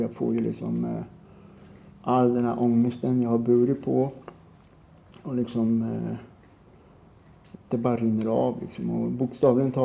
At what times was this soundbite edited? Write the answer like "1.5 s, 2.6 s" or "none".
7.5 s

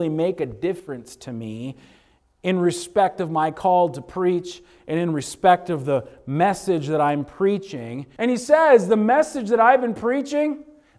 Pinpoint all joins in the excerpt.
8.2 s

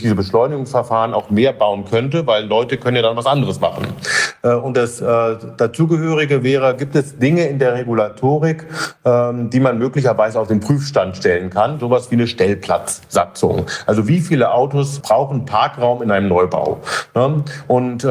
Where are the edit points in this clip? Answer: 15.0 s

